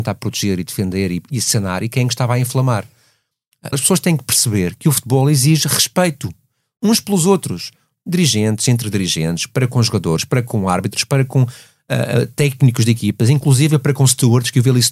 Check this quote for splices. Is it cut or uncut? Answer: cut